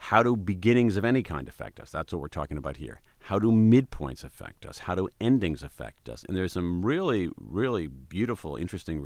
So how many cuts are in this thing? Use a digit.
0